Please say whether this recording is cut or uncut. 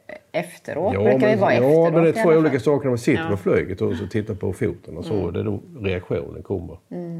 uncut